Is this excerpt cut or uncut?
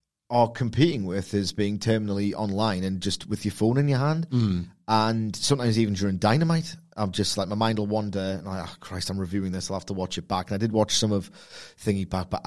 uncut